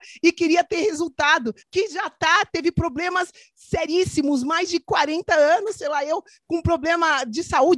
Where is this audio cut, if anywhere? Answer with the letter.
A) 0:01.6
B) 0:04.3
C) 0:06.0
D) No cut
A